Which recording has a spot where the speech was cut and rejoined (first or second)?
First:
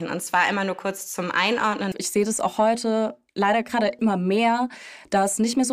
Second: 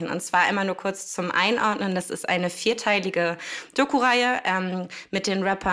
first